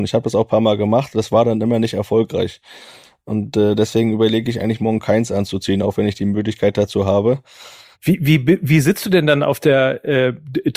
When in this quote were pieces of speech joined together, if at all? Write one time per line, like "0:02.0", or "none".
0:07.9